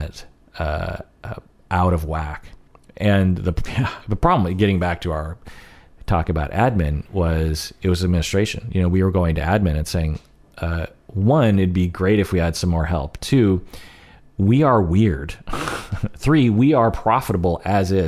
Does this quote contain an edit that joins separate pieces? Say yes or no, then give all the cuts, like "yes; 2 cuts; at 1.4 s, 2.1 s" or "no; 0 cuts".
no; 0 cuts